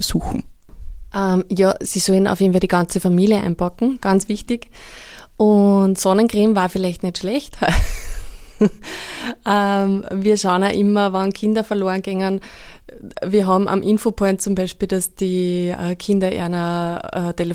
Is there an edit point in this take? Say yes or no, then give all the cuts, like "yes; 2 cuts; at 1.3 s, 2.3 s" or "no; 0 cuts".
no; 0 cuts